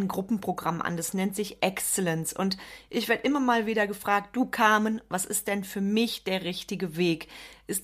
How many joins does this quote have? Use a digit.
0